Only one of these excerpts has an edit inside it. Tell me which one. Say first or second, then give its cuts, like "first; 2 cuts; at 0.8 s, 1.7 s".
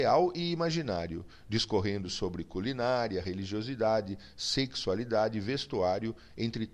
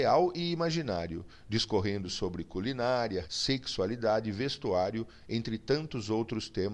second; 1 cut; at 3.2 s